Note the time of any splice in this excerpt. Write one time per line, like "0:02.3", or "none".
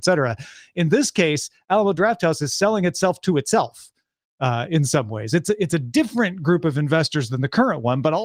none